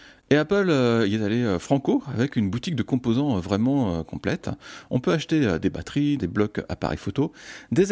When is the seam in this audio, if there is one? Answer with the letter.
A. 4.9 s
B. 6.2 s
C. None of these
B